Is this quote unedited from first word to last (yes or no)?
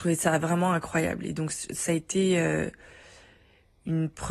yes